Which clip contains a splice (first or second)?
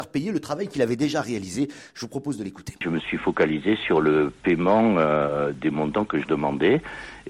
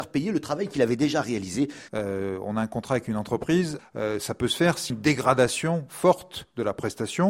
second